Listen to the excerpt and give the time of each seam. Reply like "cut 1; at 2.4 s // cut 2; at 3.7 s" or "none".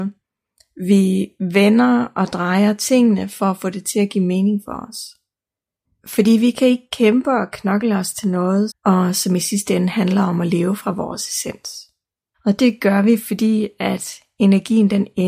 cut 1; at 5.8 s // cut 2; at 8.7 s // cut 3; at 12.3 s